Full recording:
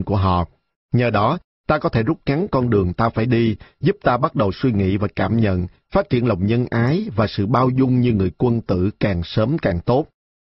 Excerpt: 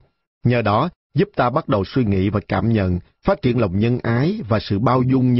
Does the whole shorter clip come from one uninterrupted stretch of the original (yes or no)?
no